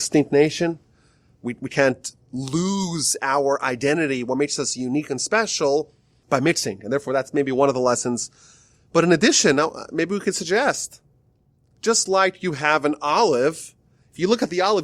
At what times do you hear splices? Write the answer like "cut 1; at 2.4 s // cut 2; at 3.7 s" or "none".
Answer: none